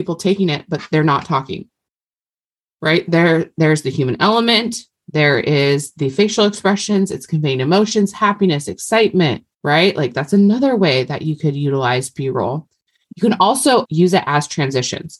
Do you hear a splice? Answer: yes; 2 cuts; at 9.5 s, 13.8 s

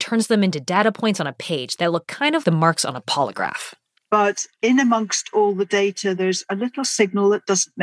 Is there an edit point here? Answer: yes; 1 cut; at 2.4 s

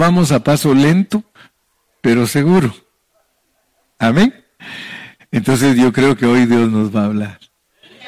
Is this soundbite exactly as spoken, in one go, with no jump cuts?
no; 1 cut; at 5.2 s

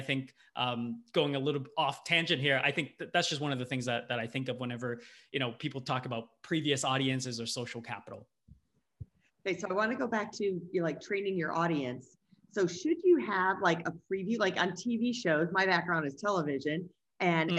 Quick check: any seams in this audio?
no; 0 cuts

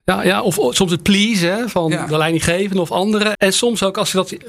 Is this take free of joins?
no; 1 cut; at 3.3 s

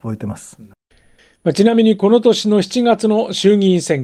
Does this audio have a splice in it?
no; 0 cuts

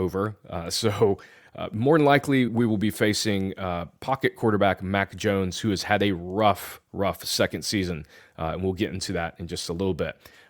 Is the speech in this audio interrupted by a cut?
no; 0 cuts

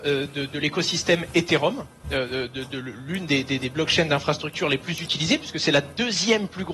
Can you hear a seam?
no; 0 cuts

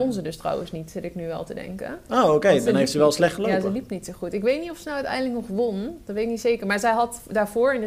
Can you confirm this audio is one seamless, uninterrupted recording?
yes; 0 cuts

